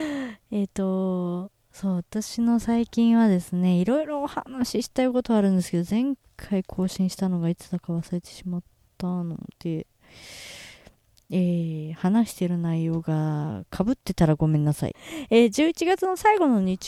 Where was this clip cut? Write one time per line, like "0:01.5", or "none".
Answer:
0:14.9